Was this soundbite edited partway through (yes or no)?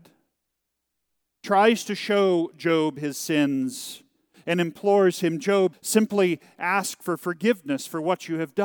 yes